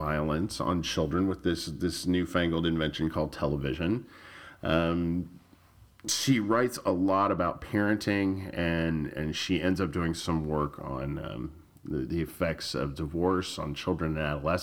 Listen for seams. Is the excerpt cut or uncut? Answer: uncut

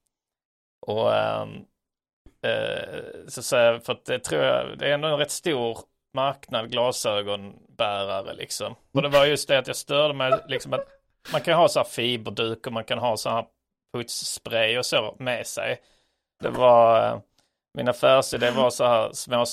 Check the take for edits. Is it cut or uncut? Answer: cut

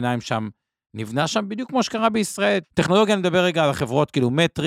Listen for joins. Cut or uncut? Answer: cut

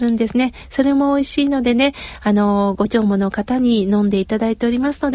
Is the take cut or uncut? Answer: uncut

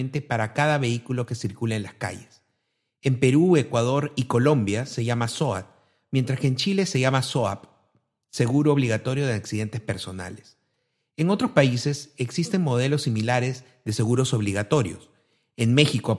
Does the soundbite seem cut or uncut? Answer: uncut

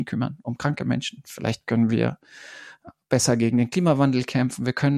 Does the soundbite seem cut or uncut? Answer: uncut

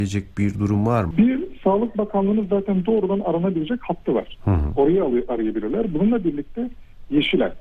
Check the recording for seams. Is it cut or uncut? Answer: cut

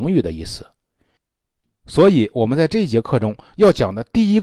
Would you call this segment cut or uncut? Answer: uncut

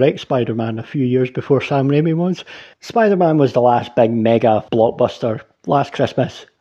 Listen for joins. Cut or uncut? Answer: cut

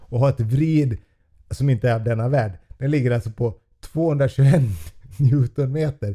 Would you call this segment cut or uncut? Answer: uncut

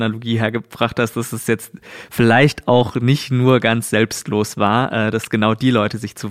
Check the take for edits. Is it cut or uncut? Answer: uncut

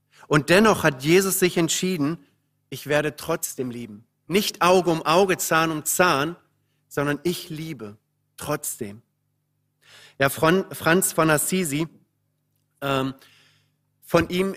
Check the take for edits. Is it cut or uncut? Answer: uncut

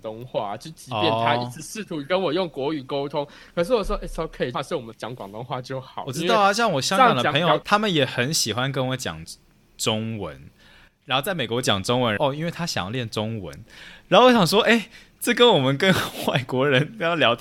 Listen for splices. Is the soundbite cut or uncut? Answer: cut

